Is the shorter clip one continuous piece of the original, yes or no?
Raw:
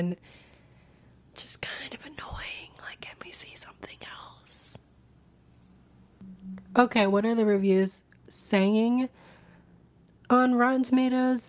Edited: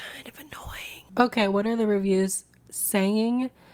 no